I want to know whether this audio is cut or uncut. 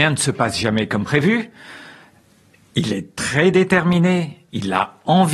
uncut